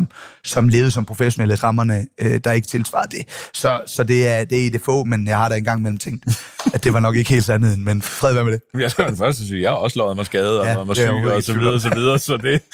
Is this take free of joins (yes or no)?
no